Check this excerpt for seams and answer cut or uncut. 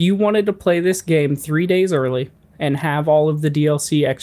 uncut